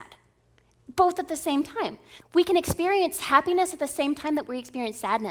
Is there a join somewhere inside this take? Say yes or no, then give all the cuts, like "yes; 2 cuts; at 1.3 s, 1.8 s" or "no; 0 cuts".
yes; 1 cut; at 2.2 s